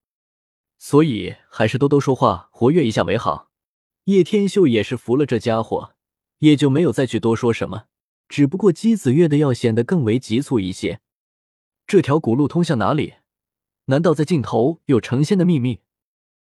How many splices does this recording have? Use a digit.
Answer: 2